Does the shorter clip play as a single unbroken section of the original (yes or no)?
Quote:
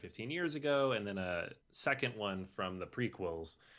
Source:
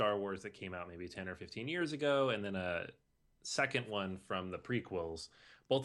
no